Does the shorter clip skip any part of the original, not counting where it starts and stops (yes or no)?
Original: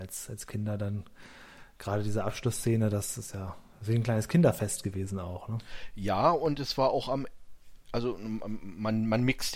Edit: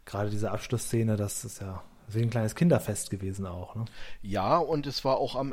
no